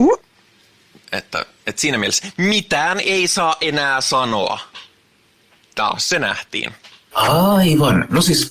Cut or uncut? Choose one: cut